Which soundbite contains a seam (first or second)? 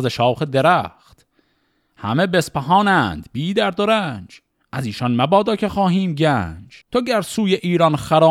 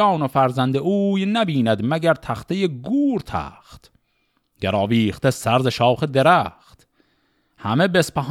first